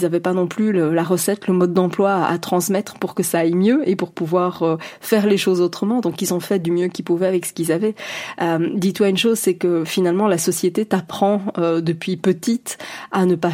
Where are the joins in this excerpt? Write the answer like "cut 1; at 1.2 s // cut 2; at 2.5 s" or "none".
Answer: none